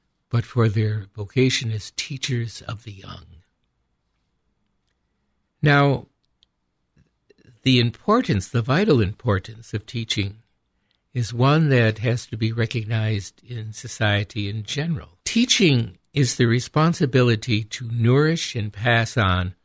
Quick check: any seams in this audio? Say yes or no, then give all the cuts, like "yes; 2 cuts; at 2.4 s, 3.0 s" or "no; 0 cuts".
yes; 2 cuts; at 5.5 s, 15.2 s